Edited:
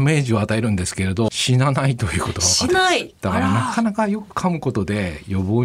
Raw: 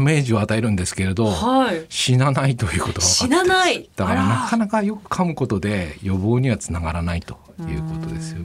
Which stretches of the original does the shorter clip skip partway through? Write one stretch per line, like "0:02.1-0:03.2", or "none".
0:01.3-0:01.9
0:03.3-0:03.4